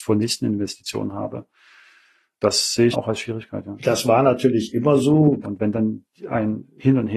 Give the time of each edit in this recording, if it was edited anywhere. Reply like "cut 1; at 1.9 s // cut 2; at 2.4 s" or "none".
cut 1; at 2.9 s // cut 2; at 5.4 s